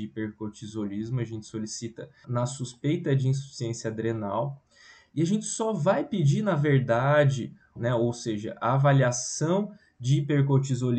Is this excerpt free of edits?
no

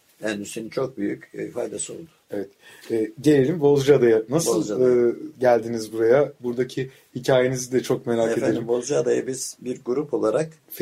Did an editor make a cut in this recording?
no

